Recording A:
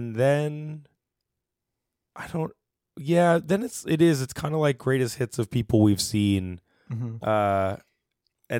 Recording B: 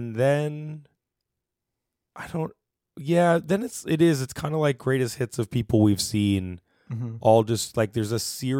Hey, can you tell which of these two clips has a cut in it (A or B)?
A